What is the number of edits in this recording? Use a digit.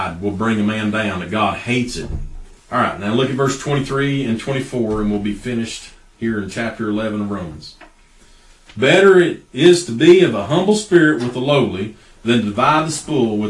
2